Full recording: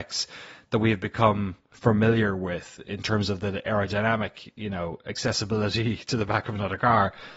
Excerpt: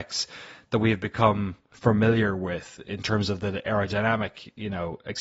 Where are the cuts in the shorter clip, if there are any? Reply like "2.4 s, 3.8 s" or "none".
none